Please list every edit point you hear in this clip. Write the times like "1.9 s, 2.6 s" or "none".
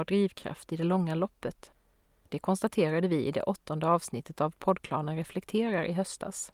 none